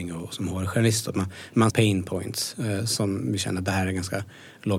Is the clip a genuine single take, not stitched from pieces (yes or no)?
no